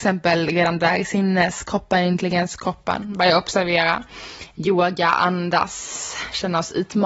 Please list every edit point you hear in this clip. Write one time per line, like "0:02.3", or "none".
0:04.5

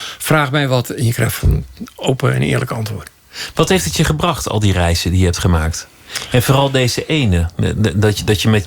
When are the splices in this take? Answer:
none

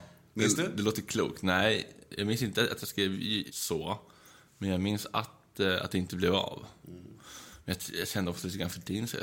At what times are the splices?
0:03.5

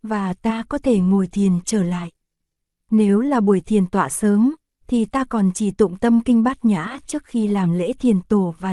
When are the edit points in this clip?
0:02.8

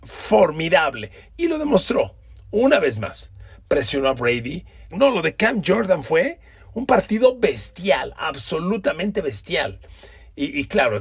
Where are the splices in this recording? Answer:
0:04.9

